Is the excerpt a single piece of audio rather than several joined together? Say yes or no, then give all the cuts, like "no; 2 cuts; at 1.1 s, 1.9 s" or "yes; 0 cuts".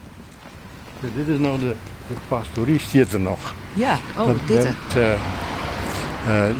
no; 1 cut; at 4.9 s